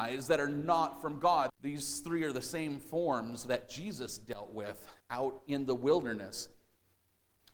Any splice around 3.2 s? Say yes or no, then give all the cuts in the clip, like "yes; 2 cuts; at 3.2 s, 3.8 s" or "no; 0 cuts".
no; 2 cuts; at 1.5 s, 5.0 s